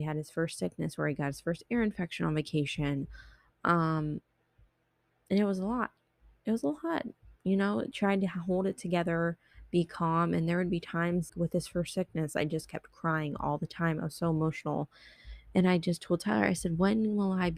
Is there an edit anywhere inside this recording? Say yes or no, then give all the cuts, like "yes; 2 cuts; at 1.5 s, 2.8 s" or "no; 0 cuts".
yes; 1 cut; at 11.3 s